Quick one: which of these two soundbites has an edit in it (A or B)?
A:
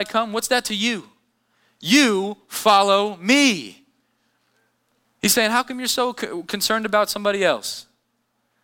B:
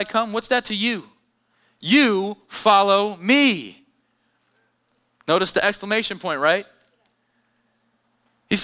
A